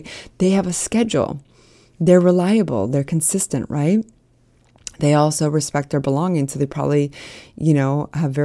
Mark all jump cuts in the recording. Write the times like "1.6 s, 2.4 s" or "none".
none

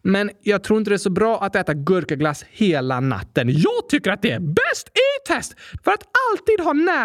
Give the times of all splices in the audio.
5.8 s

